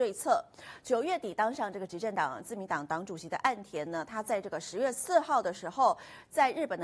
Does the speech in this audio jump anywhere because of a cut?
no; 0 cuts

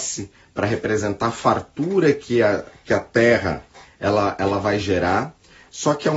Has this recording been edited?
no; 0 cuts

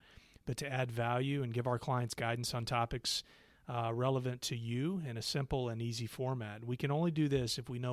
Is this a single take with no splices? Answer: yes; 0 cuts

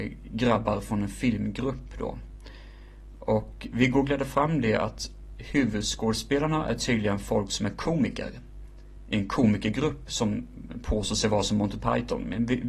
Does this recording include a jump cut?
no; 0 cuts

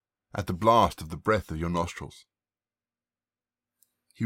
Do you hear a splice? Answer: no; 0 cuts

